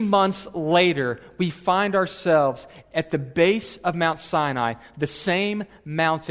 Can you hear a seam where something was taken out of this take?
no; 0 cuts

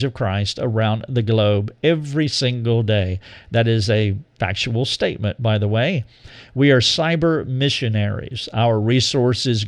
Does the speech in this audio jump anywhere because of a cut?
no; 0 cuts

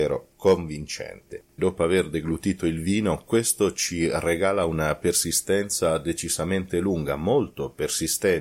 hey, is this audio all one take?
no; 1 cut; at 1.6 s

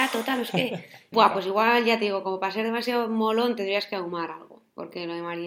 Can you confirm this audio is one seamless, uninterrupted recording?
no; 1 cut; at 1.1 s

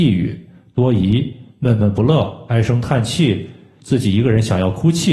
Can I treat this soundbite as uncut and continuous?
yes; 0 cuts

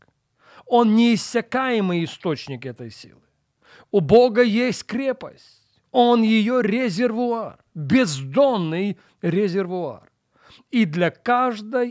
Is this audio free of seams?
yes; 0 cuts

